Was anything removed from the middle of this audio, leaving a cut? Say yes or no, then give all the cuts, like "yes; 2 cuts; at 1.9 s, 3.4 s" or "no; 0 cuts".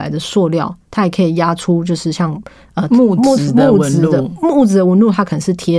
no; 0 cuts